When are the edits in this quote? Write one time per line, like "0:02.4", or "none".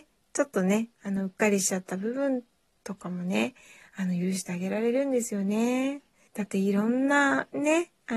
0:06.3